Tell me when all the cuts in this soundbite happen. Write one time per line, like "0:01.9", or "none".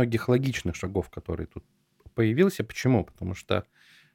none